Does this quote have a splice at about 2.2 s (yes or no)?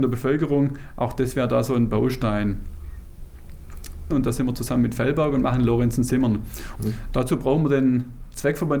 no